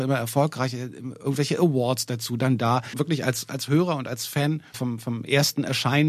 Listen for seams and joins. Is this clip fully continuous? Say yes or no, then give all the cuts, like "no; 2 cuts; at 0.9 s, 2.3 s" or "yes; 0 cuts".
no; 2 cuts; at 2.9 s, 4.7 s